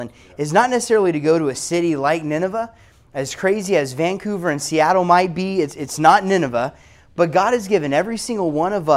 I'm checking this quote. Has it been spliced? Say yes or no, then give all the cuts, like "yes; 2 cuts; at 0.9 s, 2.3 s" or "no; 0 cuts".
no; 0 cuts